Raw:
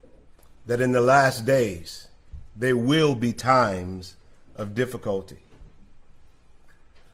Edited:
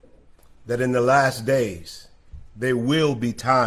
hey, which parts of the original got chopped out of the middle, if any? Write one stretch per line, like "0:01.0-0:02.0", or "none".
none